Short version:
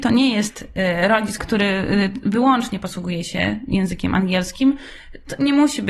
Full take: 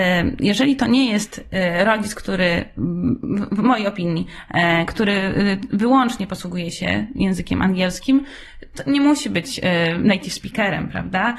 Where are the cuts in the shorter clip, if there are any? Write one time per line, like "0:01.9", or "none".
0:01.4